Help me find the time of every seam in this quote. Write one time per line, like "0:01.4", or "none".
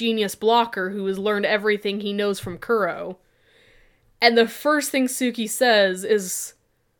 none